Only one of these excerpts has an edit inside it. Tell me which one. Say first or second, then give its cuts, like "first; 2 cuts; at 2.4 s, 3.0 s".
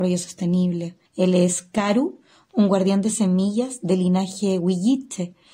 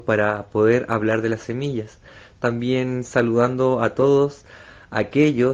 first; 1 cut; at 1.1 s